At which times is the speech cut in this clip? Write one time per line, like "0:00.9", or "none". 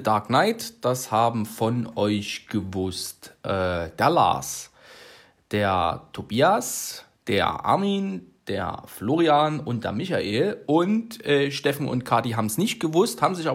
none

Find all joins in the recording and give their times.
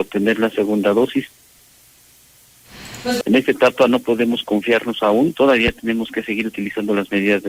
0:03.2

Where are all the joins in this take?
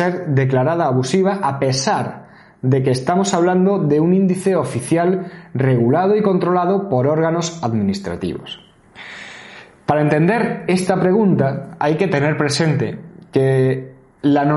none

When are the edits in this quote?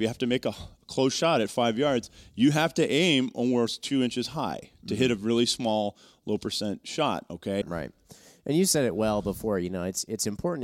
0:07.6

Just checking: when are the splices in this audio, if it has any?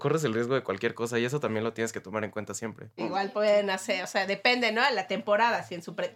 0:03.0

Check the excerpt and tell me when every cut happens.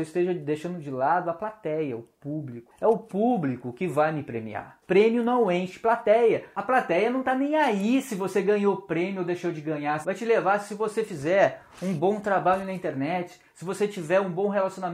0:04.8
0:10.0

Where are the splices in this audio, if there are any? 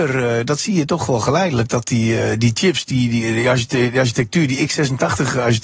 none

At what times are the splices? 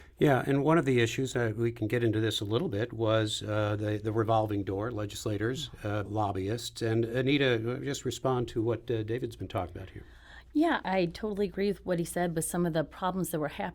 0:06.0
0:10.8

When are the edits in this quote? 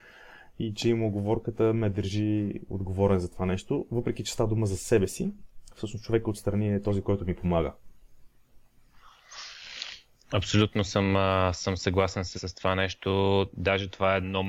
0:12.4
0:13.5

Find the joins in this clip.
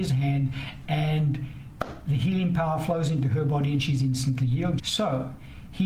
0:04.8

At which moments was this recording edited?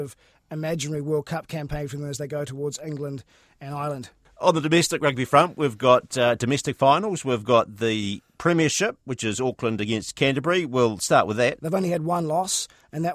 0:11.6

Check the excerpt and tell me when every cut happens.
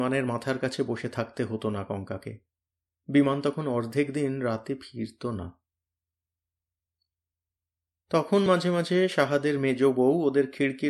none

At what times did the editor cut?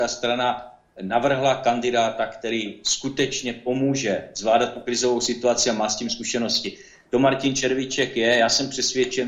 none

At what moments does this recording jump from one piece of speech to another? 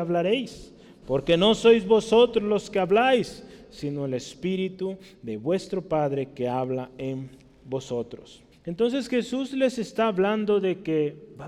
0:01.0
0:08.5

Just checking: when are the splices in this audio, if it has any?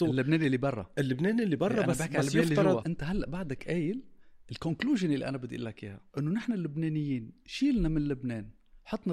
0:02.8
0:06.1

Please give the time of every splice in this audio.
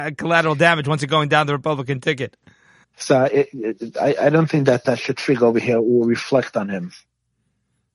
0:02.8
0:04.8

